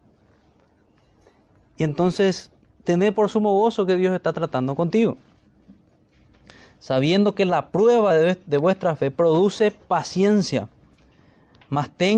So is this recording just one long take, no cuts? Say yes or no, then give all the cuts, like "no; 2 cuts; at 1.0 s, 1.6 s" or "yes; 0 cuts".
yes; 0 cuts